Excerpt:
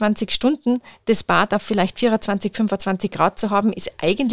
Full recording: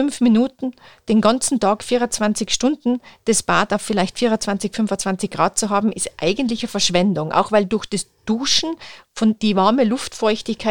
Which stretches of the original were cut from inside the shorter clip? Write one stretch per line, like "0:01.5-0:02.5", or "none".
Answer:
none